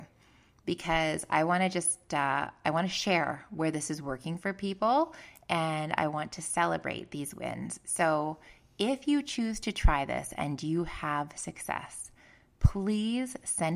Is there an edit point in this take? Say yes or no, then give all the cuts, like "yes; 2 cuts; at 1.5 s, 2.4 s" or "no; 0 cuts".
no; 0 cuts